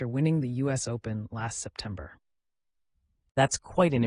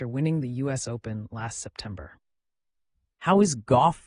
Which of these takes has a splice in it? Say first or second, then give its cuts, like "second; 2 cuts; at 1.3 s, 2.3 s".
second; 1 cut; at 3.0 s